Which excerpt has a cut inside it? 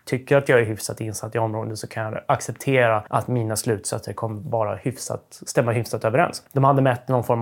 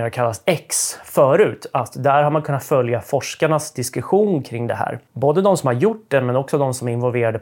first; 2 cuts; at 3.1 s, 6.5 s

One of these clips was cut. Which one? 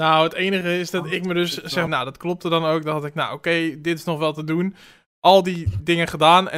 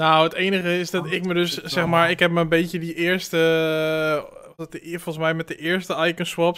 first; 1 cut; at 1.9 s

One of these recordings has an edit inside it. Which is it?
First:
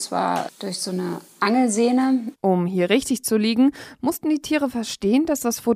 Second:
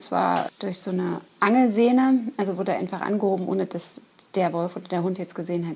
first; 1 cut; at 2.3 s

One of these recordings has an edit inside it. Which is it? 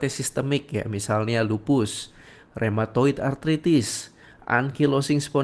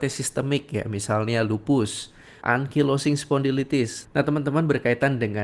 second; 2 cuts; at 2.4 s, 4.0 s

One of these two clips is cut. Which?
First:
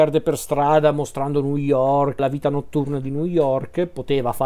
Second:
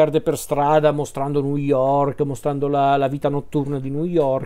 first; 1 cut; at 2.2 s

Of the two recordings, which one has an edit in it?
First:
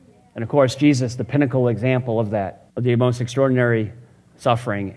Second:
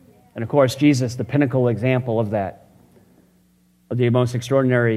first; 1 cut; at 2.7 s

